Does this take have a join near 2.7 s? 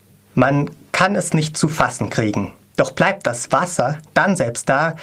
yes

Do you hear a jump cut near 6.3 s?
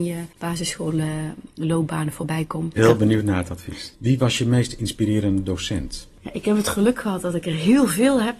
no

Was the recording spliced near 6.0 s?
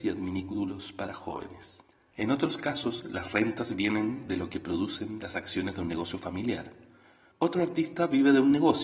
no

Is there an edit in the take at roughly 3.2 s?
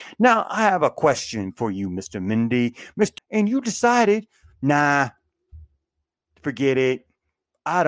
yes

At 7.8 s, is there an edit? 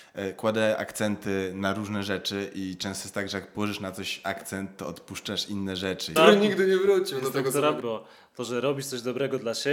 yes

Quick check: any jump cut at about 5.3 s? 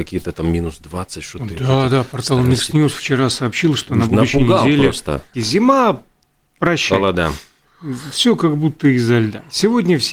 yes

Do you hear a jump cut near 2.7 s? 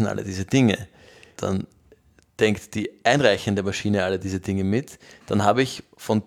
no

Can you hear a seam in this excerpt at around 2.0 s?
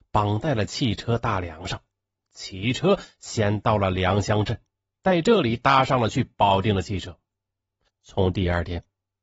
no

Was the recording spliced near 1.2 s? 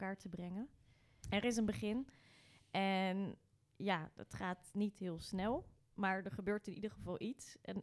yes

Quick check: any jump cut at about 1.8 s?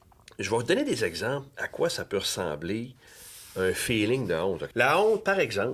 no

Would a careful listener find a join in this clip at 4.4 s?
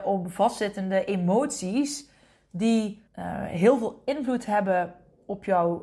no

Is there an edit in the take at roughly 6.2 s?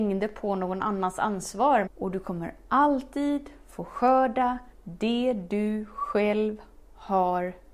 no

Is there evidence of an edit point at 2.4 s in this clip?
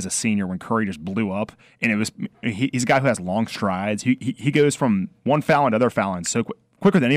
yes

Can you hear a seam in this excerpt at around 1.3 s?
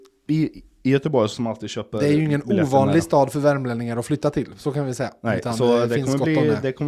yes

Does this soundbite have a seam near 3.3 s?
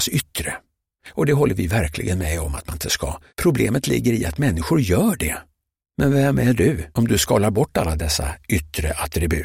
yes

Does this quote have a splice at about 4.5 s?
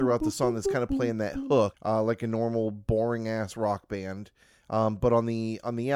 no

